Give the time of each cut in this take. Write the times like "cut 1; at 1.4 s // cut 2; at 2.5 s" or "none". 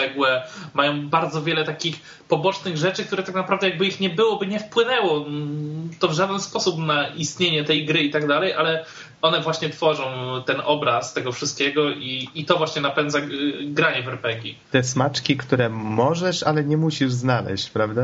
none